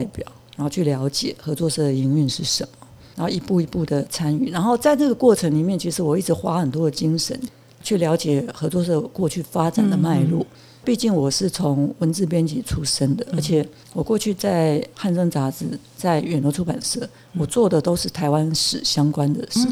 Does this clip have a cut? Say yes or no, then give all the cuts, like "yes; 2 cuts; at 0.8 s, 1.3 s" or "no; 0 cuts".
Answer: no; 0 cuts